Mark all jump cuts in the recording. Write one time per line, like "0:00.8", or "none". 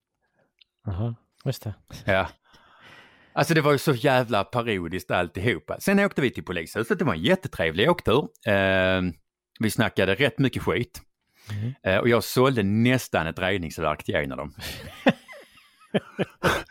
0:01.3